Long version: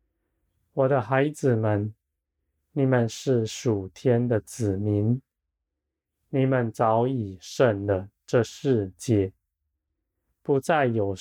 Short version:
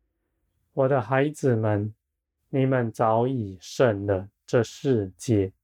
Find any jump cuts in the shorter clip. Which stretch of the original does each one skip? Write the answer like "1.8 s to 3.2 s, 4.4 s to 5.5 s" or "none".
2.4 s to 6.2 s

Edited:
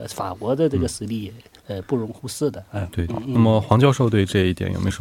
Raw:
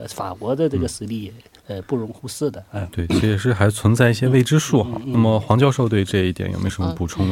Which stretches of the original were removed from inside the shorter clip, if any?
3.1 s to 4.9 s

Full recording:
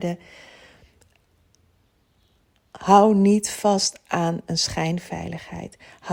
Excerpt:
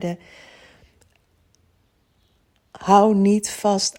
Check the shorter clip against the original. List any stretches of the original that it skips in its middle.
none

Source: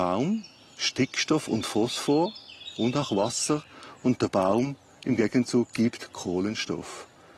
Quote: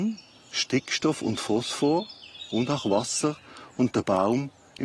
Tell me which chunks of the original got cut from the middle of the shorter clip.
none

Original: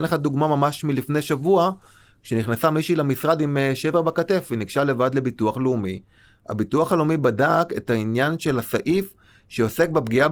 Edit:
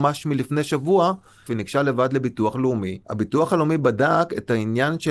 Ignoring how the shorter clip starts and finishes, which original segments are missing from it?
2.0 s to 4.5 s, 6.0 s to 6.4 s

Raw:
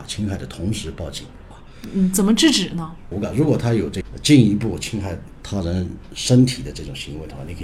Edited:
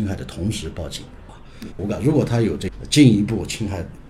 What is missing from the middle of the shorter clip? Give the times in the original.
1.9 s to 3.0 s

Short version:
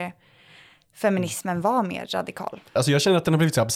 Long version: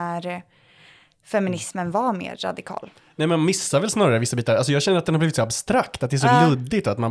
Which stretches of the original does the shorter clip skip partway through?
3.1 s to 4.6 s

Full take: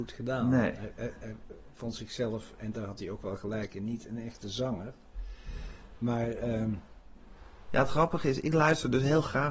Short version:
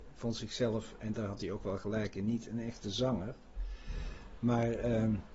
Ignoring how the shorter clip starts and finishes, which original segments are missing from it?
none

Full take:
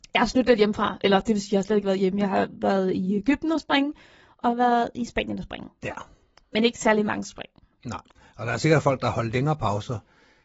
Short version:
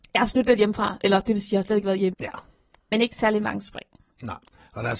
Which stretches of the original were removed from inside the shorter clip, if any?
2.1 s to 5.7 s

